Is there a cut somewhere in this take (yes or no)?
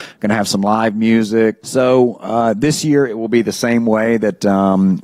yes